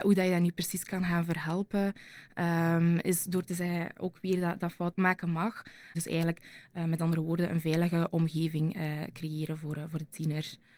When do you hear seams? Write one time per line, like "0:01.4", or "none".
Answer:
0:05.9